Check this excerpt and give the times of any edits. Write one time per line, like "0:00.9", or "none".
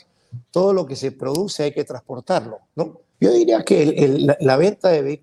0:03.1